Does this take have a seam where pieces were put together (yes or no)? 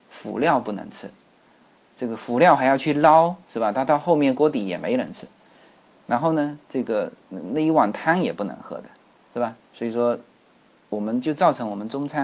no